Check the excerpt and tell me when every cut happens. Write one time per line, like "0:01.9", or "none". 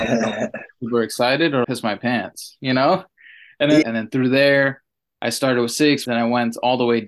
0:01.6
0:03.8
0:06.0